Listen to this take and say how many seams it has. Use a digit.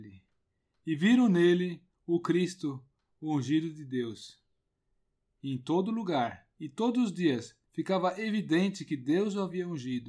2